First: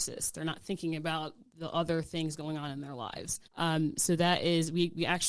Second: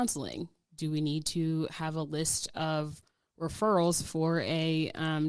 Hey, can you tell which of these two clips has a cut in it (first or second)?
first